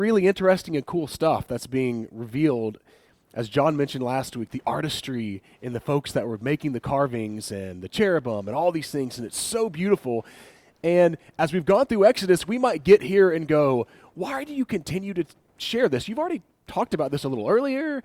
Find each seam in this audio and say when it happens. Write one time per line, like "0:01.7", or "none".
none